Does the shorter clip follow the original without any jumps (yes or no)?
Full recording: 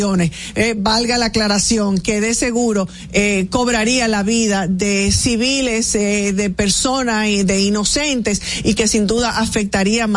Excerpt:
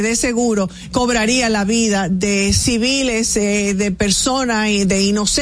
no